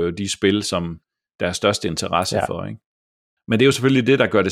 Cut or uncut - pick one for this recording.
uncut